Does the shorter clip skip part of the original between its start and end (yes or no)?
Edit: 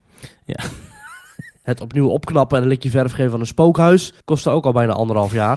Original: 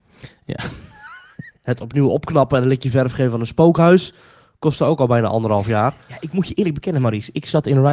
yes